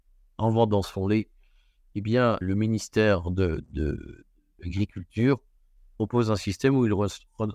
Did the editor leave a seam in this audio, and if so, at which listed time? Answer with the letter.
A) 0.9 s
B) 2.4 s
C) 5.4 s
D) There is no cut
B